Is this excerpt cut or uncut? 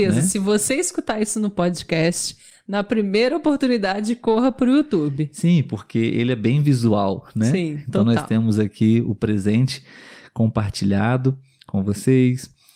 uncut